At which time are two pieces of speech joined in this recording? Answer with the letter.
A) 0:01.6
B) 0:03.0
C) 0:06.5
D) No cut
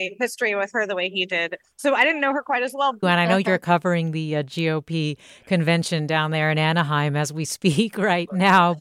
B